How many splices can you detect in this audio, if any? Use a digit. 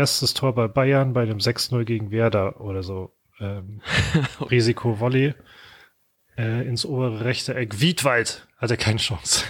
1